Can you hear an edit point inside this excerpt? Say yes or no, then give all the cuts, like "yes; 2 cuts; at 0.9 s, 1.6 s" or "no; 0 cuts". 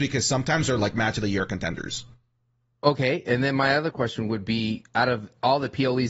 no; 0 cuts